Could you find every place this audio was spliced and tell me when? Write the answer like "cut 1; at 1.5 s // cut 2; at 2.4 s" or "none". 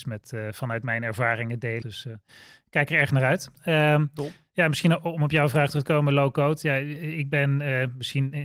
cut 1; at 1.8 s